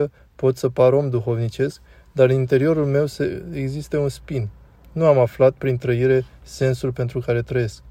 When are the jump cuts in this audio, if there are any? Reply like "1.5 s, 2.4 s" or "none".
none